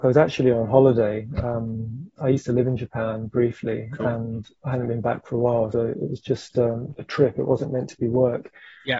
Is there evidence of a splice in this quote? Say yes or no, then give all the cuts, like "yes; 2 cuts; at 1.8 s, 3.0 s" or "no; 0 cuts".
yes; 2 cuts; at 5.7 s, 7.0 s